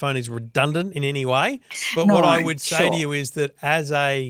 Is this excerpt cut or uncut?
uncut